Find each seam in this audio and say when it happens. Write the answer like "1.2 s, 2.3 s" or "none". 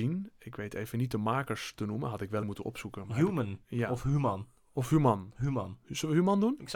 2.4 s

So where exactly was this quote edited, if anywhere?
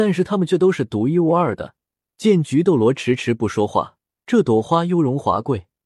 2.1 s, 4.2 s

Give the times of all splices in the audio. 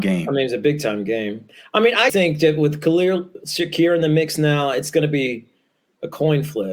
2.1 s

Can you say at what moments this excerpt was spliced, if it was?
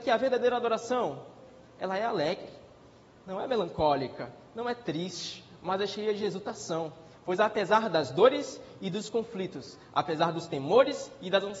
none

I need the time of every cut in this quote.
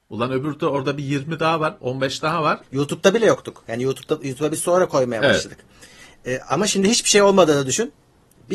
2.6 s

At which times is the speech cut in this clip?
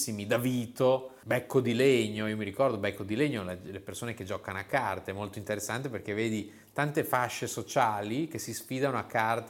none

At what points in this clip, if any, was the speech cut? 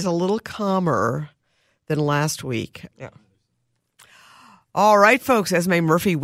2.9 s

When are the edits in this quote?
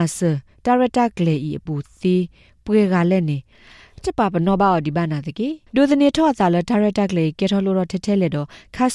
4.0 s, 5.7 s

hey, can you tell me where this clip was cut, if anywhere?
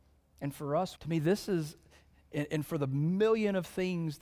1.0 s

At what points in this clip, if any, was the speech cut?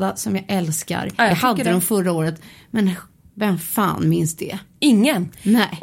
none

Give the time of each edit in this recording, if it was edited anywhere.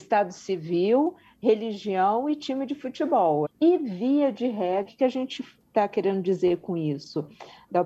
3.4 s, 4.8 s

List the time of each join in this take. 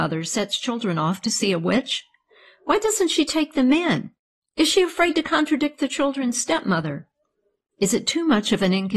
4.4 s

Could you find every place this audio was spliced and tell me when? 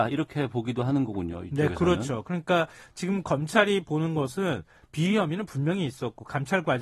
none

